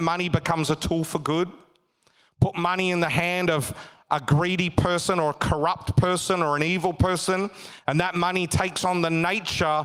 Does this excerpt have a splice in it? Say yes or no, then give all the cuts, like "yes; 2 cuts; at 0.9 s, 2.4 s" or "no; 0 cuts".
no; 0 cuts